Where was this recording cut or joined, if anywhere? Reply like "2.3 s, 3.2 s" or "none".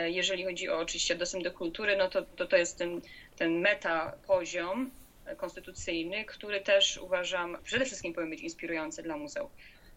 none